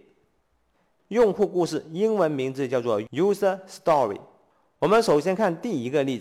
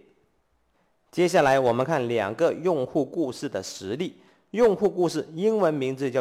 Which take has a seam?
first; 1 cut; at 1.0 s

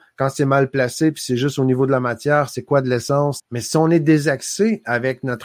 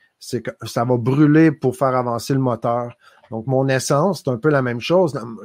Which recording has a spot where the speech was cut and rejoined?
first; 1 cut; at 3.4 s

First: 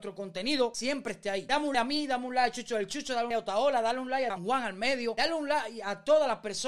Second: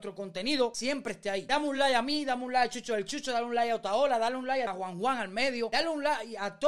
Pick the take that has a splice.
first; 3 cuts; at 1.7 s, 3.3 s, 4.4 s

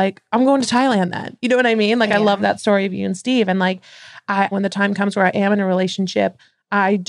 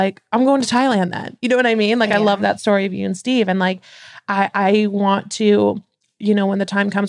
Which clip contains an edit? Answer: first; 1 cut; at 4.5 s

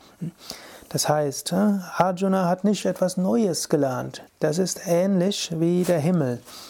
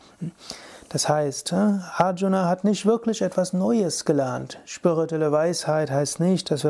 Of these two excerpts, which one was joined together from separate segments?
first; 2 cuts; at 2.8 s, 4.3 s

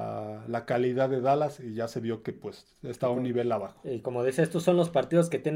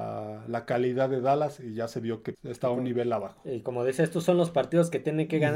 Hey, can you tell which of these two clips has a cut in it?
second; 1 cut; at 2.3 s

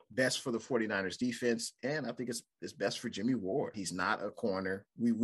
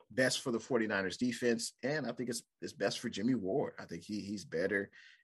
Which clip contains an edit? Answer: first; 1 cut; at 3.7 s

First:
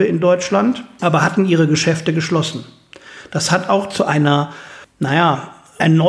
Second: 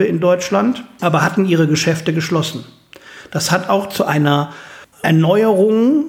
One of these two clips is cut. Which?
second; 1 cut; at 4.9 s

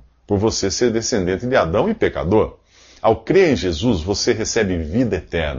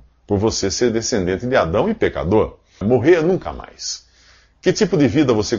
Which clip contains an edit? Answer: second; 1 cut; at 2.8 s

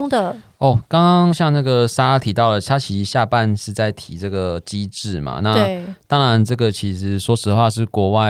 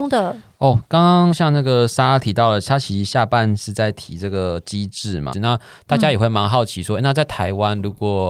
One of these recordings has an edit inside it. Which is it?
second; 1 cut; at 5.3 s

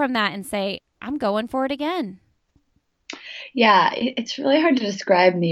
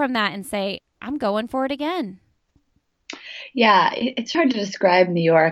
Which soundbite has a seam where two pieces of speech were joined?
second; 1 cut; at 4.3 s

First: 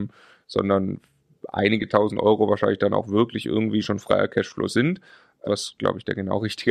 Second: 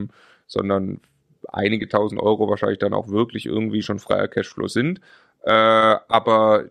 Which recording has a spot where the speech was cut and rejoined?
first; 1 cut; at 5.4 s

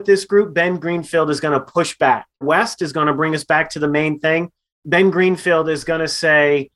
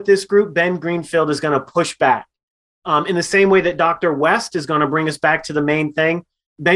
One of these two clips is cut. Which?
first; 1 cut; at 2.4 s

